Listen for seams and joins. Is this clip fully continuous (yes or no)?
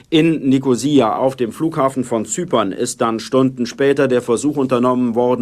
no